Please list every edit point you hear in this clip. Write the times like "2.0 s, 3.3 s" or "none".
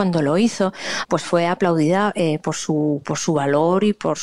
1.0 s